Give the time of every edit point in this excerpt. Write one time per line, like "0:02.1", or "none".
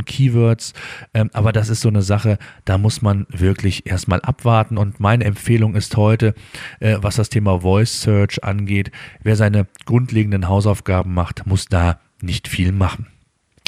none